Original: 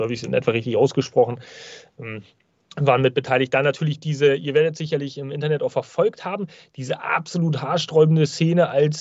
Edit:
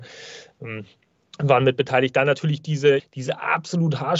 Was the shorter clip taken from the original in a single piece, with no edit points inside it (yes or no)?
no